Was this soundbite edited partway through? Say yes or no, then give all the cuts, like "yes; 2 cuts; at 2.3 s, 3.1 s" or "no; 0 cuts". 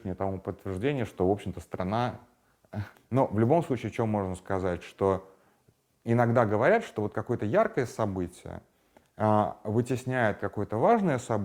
yes; 1 cut; at 2.9 s